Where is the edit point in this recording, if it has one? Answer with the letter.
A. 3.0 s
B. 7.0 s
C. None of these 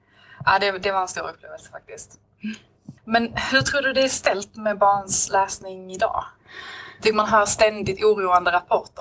A